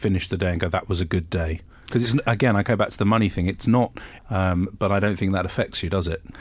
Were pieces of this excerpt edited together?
yes; 1 cut; at 4.2 s

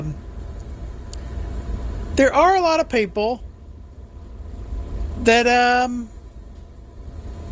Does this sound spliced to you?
no; 0 cuts

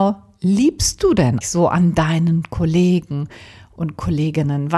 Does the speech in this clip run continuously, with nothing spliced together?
no; 1 cut; at 1.4 s

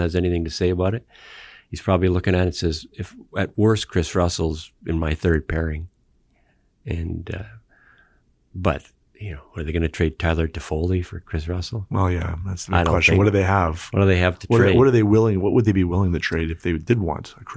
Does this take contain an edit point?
no; 0 cuts

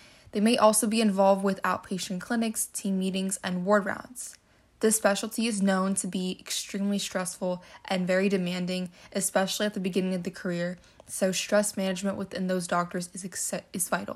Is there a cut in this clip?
no; 0 cuts

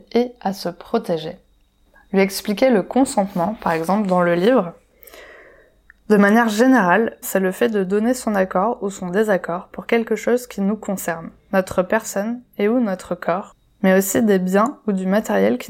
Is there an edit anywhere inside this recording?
yes; 1 cut; at 7.2 s

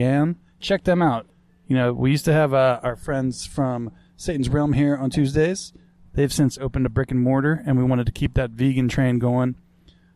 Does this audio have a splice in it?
no; 0 cuts

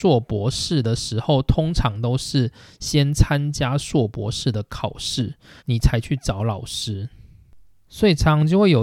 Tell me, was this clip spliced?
yes; 1 cut; at 5.6 s

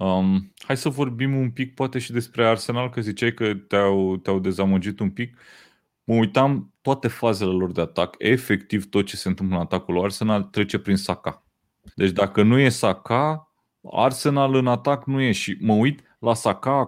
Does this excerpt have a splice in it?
yes; 1 cut; at 11.9 s

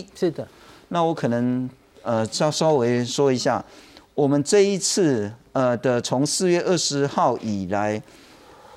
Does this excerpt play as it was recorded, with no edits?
yes; 0 cuts

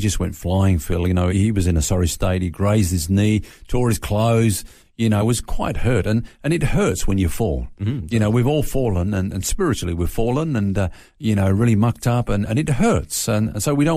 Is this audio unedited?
no; 1 cut; at 1.3 s

